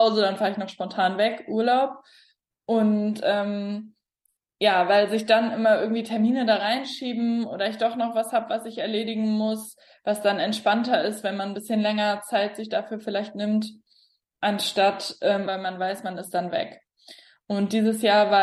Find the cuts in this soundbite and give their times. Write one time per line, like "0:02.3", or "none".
0:15.5